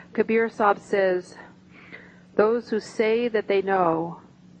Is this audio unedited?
yes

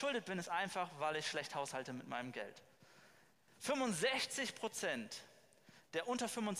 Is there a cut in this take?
no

